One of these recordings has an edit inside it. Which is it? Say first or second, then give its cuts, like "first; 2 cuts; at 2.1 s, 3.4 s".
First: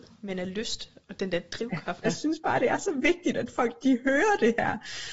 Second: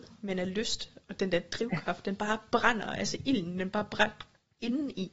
first; 1 cut; at 2.0 s